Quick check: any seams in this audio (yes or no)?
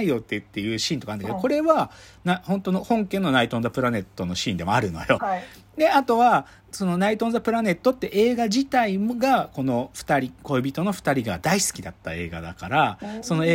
yes